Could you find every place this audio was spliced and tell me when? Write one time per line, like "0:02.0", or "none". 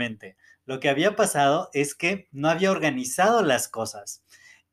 none